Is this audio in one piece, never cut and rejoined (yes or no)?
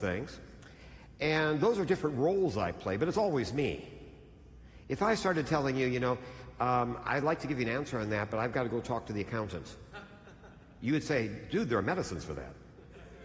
yes